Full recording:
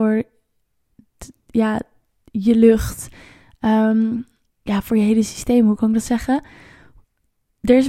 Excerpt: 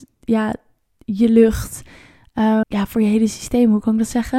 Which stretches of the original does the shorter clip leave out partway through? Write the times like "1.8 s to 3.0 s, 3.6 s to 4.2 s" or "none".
3.9 s to 4.6 s